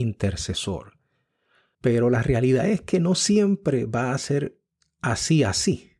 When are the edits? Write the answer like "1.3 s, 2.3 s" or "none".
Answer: 1.7 s

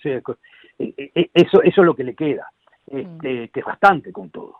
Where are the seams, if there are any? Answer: none

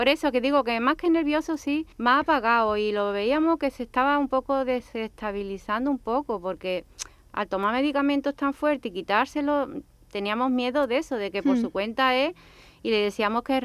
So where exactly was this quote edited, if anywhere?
1.9 s

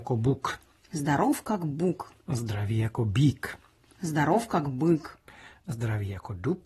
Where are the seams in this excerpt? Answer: none

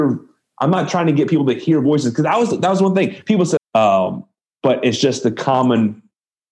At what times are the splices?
3.6 s

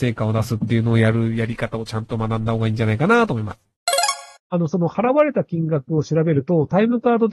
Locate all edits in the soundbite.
4.4 s

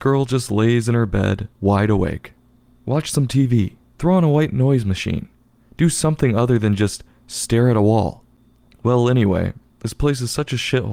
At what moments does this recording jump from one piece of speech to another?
3.8 s

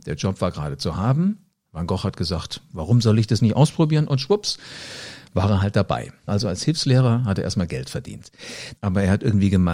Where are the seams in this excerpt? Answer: 6.3 s, 8.8 s

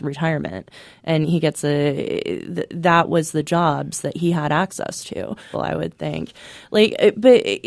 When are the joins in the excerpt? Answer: 5.5 s

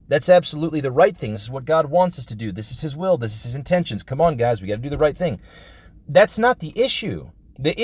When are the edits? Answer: 1.3 s

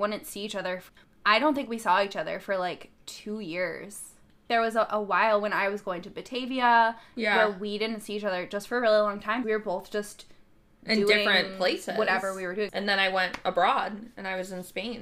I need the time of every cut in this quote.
none

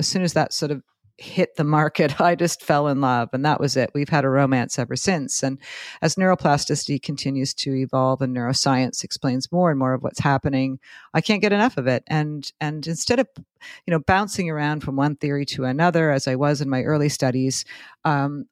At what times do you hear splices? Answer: none

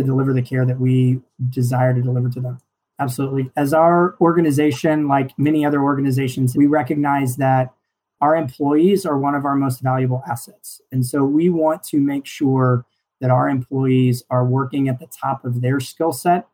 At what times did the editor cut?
2.9 s, 6.5 s

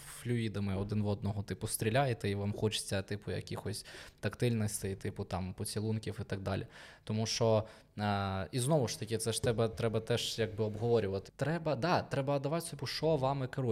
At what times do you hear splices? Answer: 11.3 s, 12.8 s

